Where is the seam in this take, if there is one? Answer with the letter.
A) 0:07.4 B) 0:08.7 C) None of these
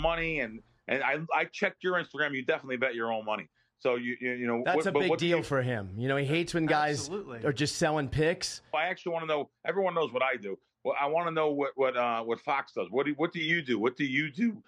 B